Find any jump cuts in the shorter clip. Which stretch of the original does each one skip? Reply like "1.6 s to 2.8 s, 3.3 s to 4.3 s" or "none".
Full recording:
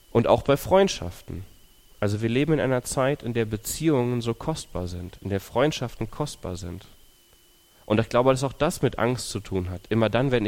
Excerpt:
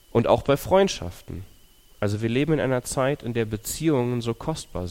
none

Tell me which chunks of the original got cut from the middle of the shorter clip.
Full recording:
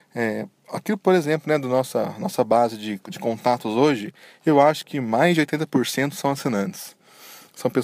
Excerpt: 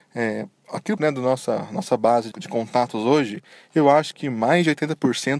1.0 s to 1.4 s, 2.8 s to 3.0 s

